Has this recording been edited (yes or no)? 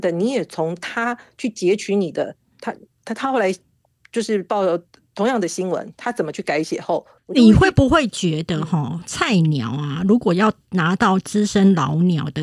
yes